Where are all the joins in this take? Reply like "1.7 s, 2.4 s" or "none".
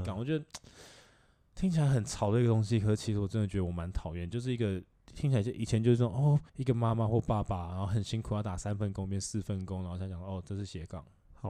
6.5 s